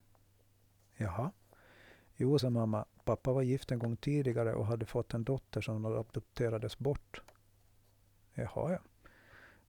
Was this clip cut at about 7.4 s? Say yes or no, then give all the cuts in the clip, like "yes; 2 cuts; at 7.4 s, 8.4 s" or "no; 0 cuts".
no; 1 cut; at 2.4 s